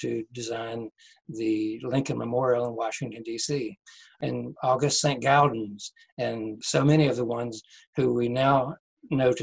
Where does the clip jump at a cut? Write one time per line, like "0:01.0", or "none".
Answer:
none

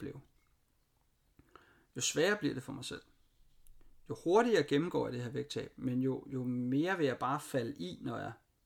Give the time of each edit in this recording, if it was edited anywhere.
none

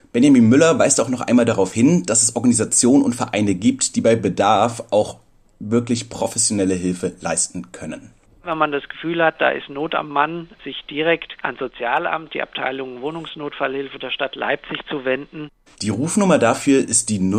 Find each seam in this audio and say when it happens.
0:11.4

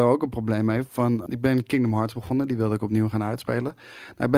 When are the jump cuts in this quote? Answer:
0:01.3

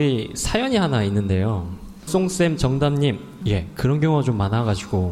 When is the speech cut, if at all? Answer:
0:02.1
0:03.4

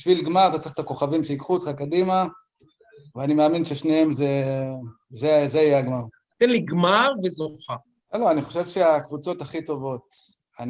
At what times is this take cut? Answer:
0:06.3
0:08.0

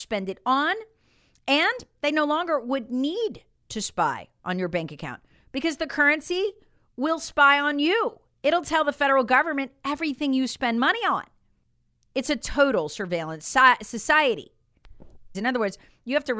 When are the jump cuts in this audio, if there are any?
0:15.3

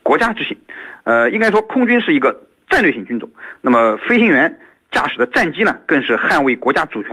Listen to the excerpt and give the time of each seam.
0:01.0

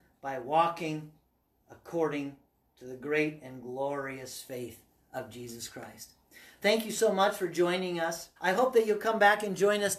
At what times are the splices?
0:08.4

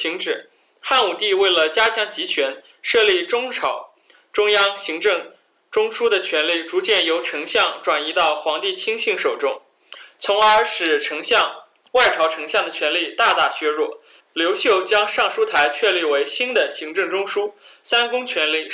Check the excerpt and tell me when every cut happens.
0:14.2

